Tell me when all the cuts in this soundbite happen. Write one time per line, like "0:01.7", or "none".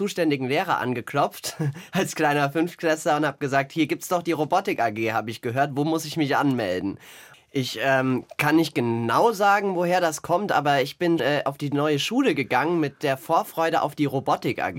0:07.3
0:11.2